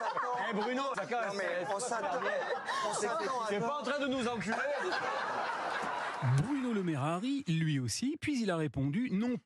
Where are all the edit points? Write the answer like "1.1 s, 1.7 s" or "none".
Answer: 0.9 s